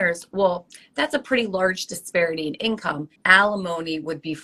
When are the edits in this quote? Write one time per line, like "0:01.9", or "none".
0:03.2